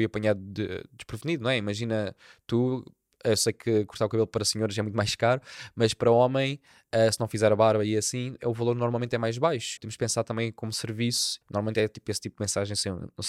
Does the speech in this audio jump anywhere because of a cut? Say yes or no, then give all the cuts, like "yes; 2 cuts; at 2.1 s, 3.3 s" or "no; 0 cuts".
yes; 2 cuts; at 9.8 s, 11.4 s